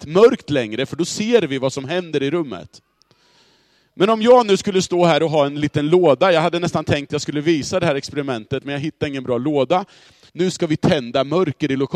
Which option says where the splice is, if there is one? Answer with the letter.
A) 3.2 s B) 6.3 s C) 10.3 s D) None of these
C